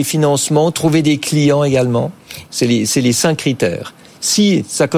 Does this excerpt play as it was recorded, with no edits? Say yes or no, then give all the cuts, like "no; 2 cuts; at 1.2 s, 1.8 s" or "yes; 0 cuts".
no; 1 cut; at 2.5 s